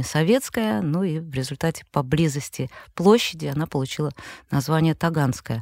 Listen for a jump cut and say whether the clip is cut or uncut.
uncut